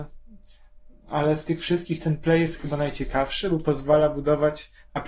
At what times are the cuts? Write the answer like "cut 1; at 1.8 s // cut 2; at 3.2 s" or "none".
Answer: none

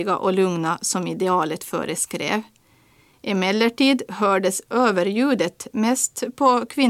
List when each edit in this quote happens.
cut 1; at 3.1 s

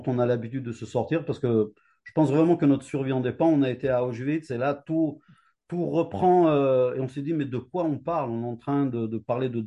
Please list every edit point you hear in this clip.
none

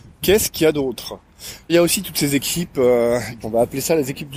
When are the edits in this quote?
cut 1; at 1.7 s // cut 2; at 3.4 s

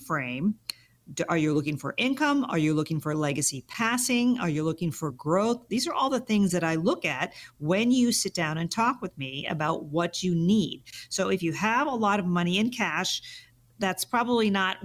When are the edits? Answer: none

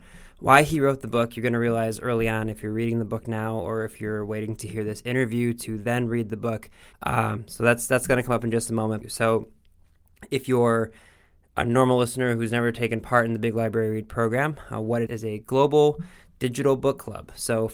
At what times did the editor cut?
cut 1; at 6.9 s // cut 2; at 9.0 s // cut 3; at 15.1 s

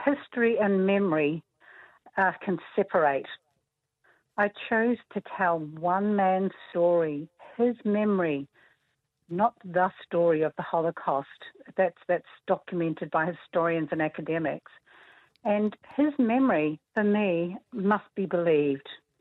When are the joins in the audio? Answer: cut 1; at 16.8 s

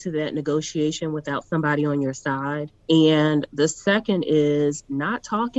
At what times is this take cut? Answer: cut 1; at 2.8 s

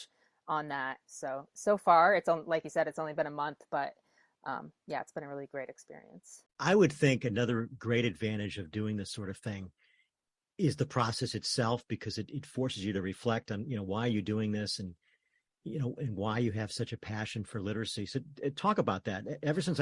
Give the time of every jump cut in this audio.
cut 1; at 1.0 s

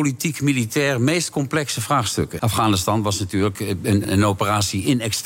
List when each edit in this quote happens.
cut 1; at 2.4 s // cut 2; at 4.0 s

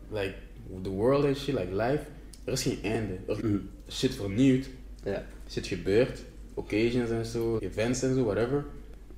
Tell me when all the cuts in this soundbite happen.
cut 1; at 3.4 s // cut 2; at 7.6 s

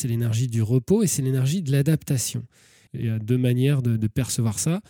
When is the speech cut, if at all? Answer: cut 1; at 2.9 s

